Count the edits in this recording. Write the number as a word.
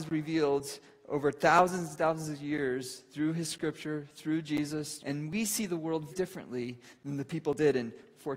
two